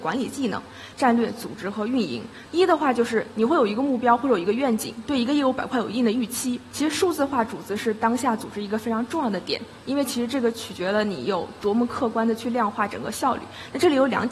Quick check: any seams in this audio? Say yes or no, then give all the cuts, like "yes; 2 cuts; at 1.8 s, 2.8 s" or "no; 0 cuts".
yes; 2 cuts; at 2.5 s, 6.7 s